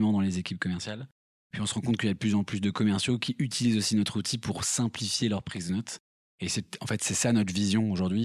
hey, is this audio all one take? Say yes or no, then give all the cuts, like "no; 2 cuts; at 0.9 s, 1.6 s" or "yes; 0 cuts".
yes; 0 cuts